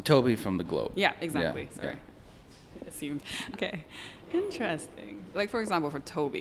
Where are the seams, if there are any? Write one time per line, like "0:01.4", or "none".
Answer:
0:03.5
0:05.3

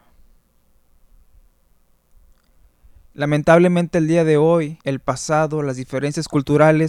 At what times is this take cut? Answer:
0:04.8

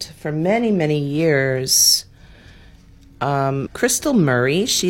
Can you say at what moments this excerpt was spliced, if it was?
0:03.7

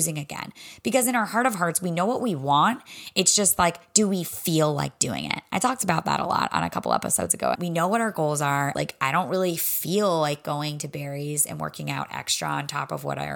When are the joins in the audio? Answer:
0:07.6
0:08.7

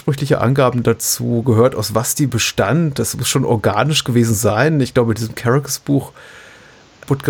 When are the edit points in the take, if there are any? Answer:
none

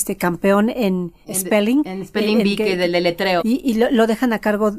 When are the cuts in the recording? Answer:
none

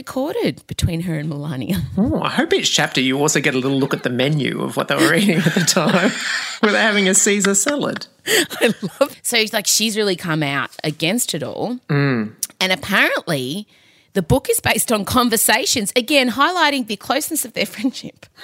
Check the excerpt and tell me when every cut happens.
0:09.1

